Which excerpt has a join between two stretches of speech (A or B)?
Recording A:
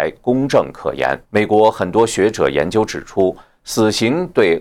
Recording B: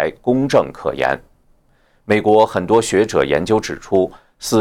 A